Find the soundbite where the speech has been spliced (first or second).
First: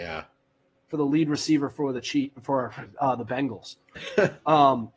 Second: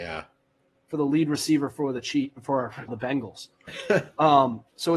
second